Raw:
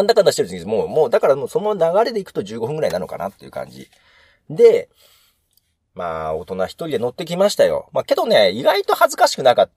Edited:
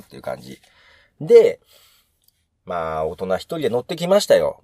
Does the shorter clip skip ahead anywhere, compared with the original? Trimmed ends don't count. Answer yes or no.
no